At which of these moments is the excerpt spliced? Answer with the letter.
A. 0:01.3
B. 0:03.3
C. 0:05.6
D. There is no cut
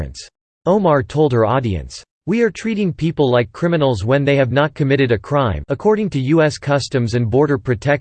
C